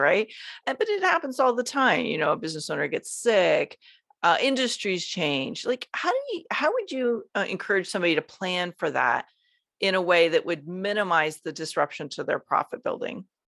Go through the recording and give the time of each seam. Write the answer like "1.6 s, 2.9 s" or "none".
4.1 s